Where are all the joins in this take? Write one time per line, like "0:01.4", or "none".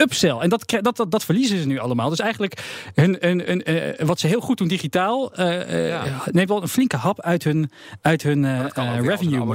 none